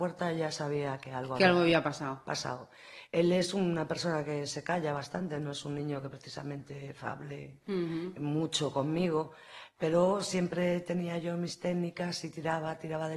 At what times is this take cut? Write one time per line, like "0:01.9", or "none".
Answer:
none